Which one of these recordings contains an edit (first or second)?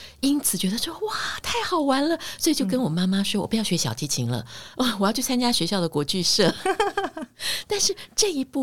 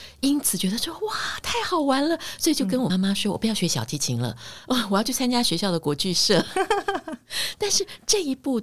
second